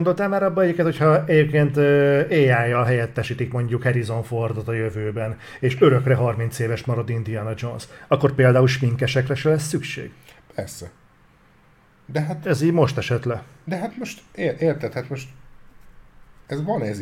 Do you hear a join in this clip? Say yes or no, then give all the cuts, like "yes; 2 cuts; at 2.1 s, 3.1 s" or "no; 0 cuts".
no; 0 cuts